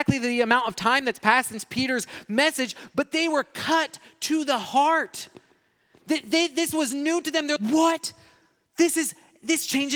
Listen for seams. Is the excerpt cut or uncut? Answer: cut